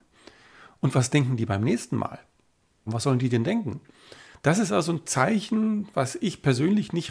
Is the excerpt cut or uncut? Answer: cut